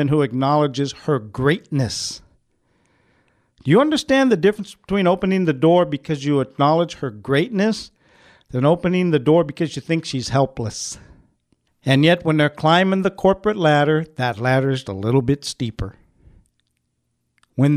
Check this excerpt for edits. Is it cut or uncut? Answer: cut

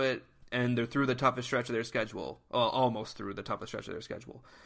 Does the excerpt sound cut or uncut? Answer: uncut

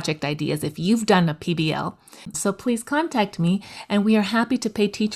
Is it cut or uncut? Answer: cut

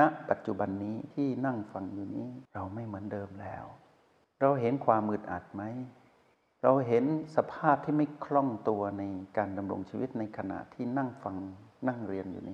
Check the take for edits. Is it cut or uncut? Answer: cut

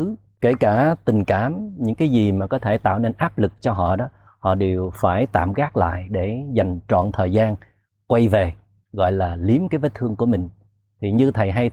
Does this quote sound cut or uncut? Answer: uncut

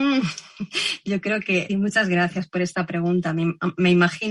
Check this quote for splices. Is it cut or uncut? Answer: cut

